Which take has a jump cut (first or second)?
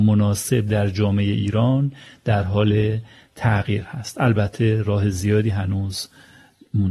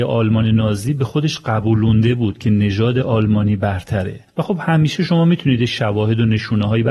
second